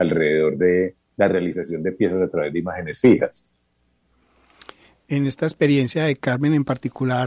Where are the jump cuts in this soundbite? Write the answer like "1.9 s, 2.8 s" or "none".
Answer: none

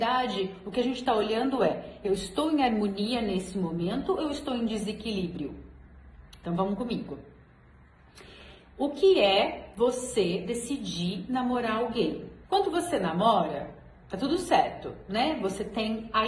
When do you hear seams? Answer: 12.4 s

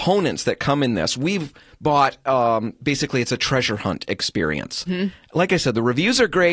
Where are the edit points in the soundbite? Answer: 4.9 s

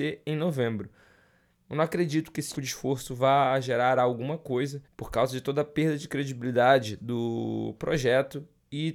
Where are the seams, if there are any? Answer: 1.5 s, 2.5 s, 4.8 s

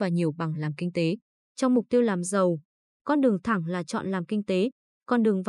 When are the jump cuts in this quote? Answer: 1.4 s, 2.9 s

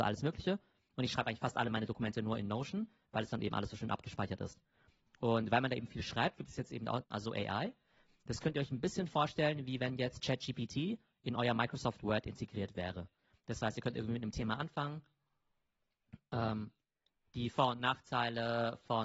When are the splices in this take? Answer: 7.0 s

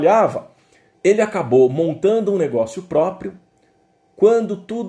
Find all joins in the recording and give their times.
0.9 s

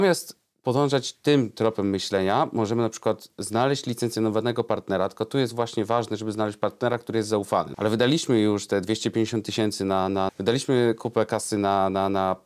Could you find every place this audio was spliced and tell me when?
7.7 s, 10.3 s

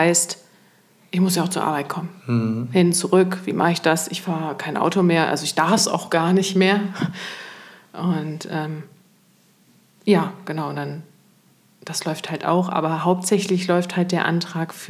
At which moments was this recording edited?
none

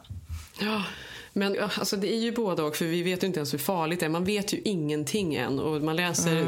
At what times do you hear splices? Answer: 1.5 s

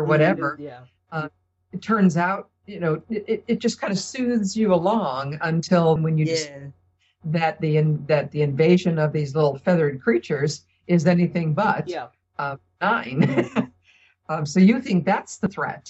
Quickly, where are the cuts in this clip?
3.3 s, 6.0 s

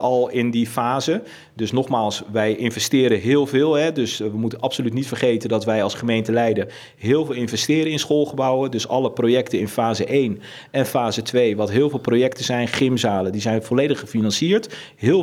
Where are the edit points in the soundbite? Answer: none

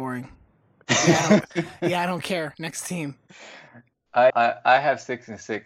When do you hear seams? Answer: 4.3 s

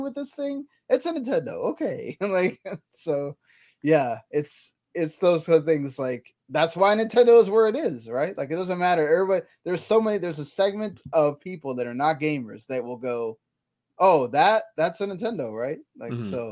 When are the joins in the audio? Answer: none

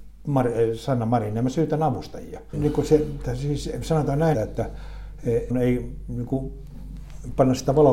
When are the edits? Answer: 2.5 s, 4.3 s, 5.5 s

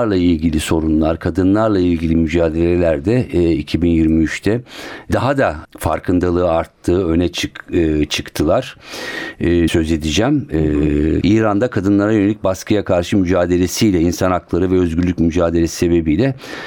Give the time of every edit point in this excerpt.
9.7 s, 11.2 s

